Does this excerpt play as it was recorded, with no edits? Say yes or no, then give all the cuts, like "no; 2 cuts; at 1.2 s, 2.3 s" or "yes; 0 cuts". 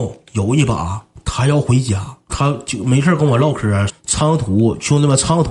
no; 2 cuts; at 2.3 s, 3.9 s